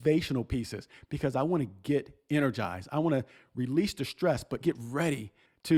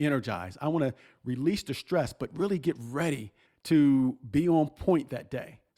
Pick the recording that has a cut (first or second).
first